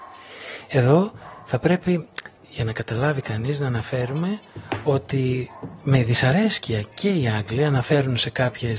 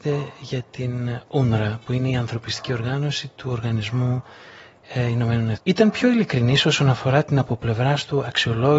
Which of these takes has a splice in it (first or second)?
second